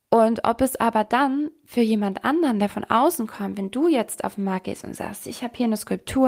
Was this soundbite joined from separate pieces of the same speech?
no; 0 cuts

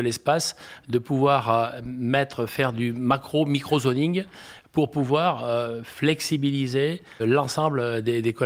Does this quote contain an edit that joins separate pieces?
yes; 1 cut; at 7.2 s

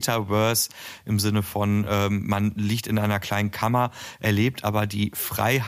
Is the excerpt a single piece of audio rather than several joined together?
yes; 0 cuts

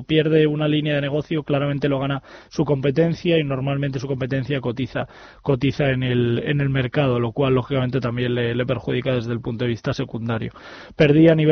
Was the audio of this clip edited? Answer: no; 0 cuts

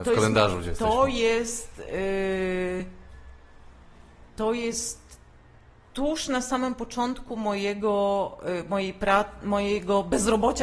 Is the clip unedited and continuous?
yes; 0 cuts

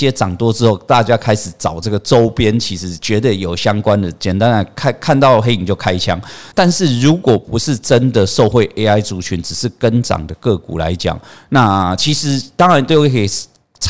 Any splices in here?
yes; 1 cut; at 6.5 s

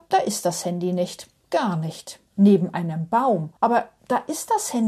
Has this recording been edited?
yes; 2 cuts; at 2.3 s, 3.6 s

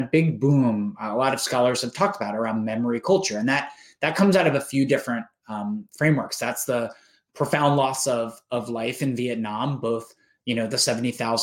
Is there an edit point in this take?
no; 0 cuts

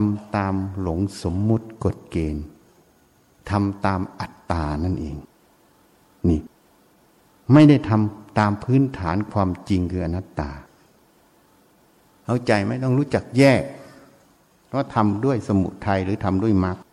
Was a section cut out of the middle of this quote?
no; 0 cuts

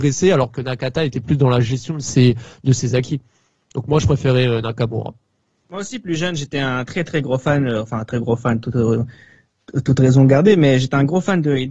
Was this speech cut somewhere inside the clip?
yes; 1 cut; at 6.9 s

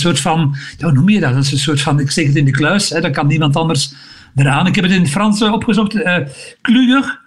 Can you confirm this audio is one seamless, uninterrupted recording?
yes; 0 cuts

